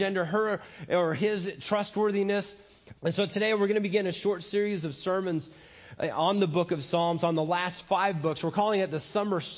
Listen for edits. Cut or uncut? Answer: cut